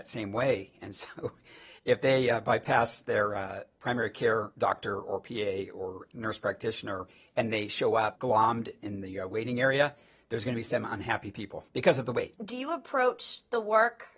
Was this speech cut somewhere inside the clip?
no; 0 cuts

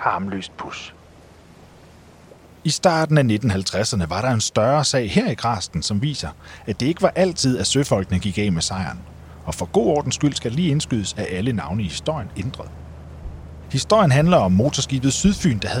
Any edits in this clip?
yes; 1 cut; at 12.3 s

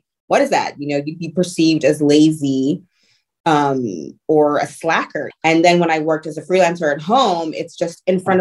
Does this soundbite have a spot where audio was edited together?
yes; 1 cut; at 5.3 s

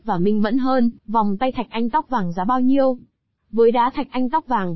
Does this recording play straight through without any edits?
no; 2 cuts; at 1.0 s, 3.4 s

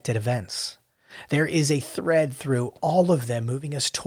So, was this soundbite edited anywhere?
no; 0 cuts

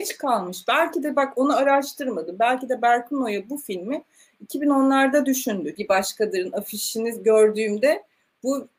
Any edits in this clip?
yes; 1 cut; at 5.7 s

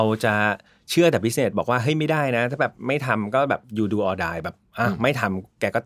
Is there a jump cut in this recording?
no; 0 cuts

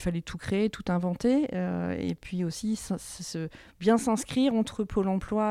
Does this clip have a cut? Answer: no; 0 cuts

